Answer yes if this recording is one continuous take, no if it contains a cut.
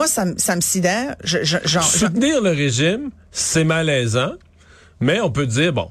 yes